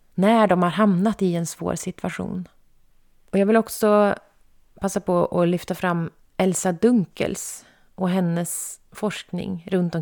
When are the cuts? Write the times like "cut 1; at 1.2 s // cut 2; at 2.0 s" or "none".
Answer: none